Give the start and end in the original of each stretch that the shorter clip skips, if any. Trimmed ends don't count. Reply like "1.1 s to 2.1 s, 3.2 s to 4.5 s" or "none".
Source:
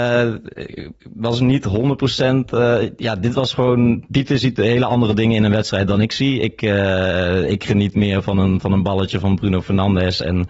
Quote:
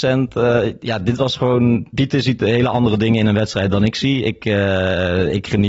none